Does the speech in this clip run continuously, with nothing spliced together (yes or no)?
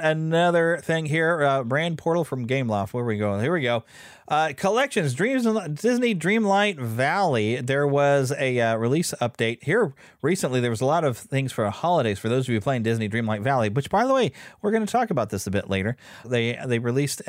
no